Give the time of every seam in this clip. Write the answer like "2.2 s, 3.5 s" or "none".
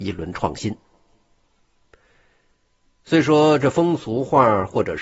none